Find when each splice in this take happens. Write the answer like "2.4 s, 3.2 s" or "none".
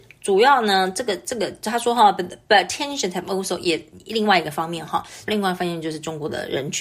5.3 s